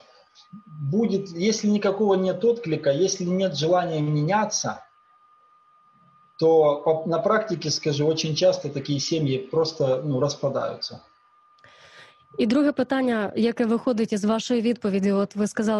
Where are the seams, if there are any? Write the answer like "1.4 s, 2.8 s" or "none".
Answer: none